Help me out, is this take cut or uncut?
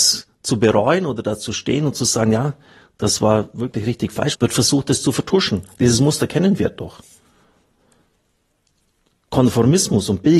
cut